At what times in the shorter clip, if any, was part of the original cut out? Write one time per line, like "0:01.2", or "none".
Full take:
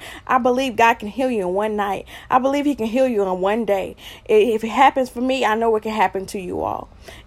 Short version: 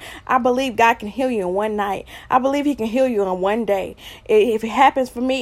none